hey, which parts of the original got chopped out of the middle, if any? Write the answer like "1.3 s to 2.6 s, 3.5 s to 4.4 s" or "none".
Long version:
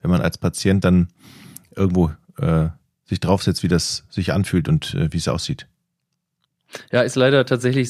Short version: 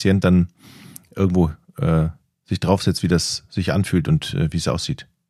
none